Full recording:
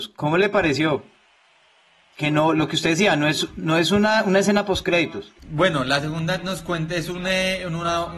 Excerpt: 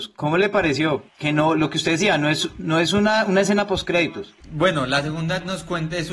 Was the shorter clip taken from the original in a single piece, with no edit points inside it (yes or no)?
no